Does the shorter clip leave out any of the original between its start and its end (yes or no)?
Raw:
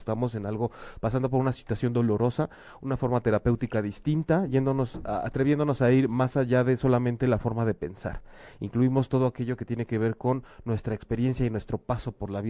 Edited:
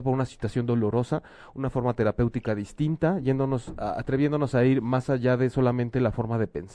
no